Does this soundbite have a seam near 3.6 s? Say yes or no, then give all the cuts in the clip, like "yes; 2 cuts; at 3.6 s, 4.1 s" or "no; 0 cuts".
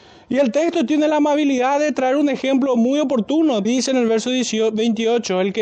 yes; 1 cut; at 3.6 s